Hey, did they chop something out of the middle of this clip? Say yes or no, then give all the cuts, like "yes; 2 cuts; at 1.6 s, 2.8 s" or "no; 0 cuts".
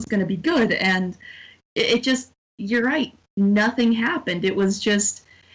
no; 0 cuts